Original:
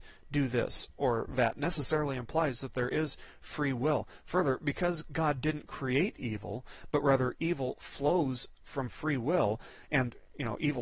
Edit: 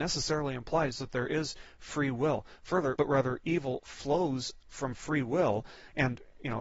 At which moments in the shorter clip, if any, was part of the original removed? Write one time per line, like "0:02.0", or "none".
0:03.0